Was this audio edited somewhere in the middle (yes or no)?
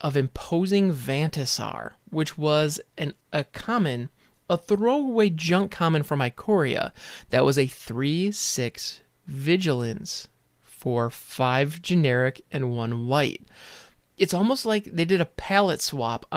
no